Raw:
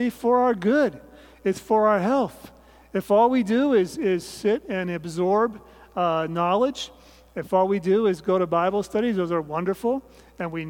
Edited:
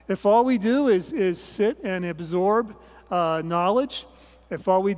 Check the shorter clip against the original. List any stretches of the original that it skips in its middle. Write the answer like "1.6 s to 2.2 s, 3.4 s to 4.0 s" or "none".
none